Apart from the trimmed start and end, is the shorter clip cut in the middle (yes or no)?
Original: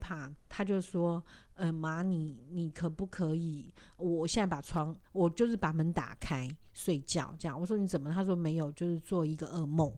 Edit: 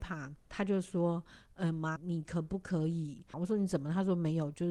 yes